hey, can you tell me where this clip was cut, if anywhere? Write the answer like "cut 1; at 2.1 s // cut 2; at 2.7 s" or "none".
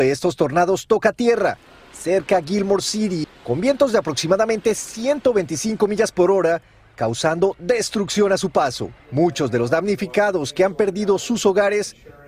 cut 1; at 3.2 s // cut 2; at 9.0 s